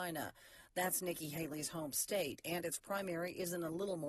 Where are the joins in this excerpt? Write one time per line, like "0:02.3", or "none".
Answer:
none